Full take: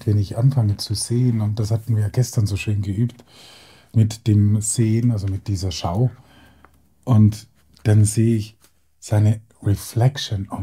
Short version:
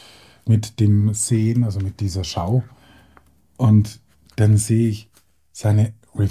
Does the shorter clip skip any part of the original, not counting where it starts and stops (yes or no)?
no